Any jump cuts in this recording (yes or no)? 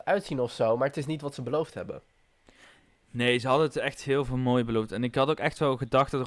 no